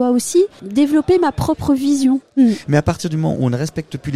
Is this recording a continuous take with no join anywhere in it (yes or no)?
no